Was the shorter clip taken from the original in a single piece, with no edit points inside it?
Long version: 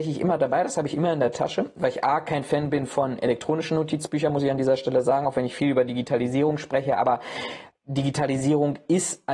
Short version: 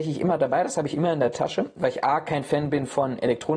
yes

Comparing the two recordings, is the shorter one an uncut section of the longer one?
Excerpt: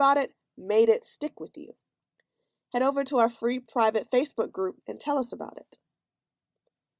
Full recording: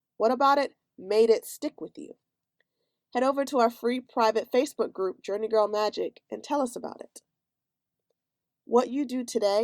no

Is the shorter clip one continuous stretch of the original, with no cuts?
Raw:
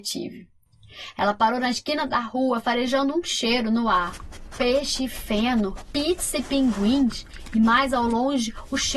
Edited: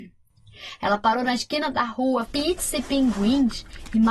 no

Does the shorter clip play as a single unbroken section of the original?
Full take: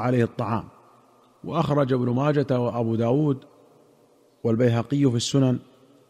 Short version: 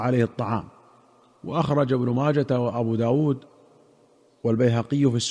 yes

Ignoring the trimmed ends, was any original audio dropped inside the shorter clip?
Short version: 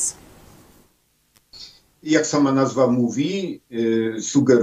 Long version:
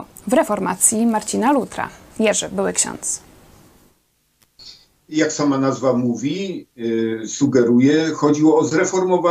no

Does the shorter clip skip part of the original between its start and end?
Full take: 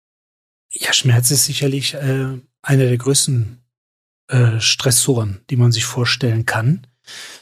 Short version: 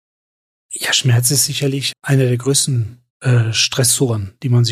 yes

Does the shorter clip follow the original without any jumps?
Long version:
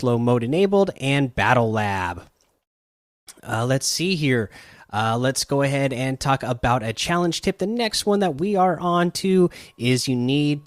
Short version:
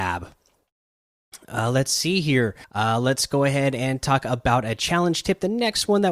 no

